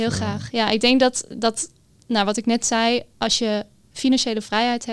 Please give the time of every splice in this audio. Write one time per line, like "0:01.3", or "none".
none